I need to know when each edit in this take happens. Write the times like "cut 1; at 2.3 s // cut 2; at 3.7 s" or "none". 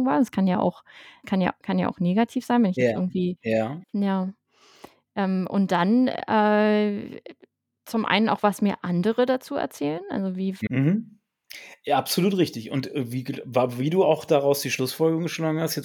cut 1; at 1.2 s // cut 2; at 3.8 s // cut 3; at 10.7 s